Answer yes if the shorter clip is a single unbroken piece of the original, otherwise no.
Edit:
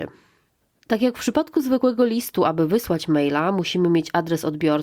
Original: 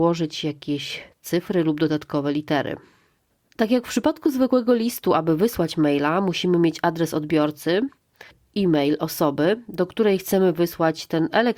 yes